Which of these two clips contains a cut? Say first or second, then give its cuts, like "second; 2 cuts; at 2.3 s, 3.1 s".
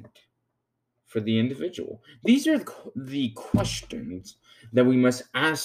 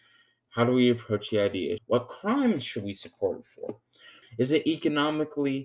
second; 2 cuts; at 1.8 s, 4.2 s